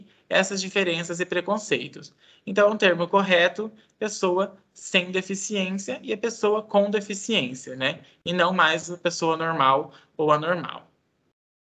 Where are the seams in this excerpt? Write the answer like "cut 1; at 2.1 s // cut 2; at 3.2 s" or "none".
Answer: none